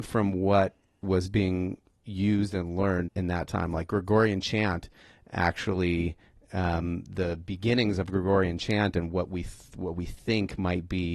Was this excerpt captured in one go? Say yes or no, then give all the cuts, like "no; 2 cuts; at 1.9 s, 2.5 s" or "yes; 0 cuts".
no; 1 cut; at 3.1 s